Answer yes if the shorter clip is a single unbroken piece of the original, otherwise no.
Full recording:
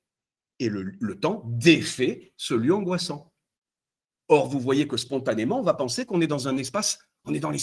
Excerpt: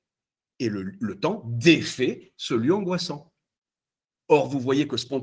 yes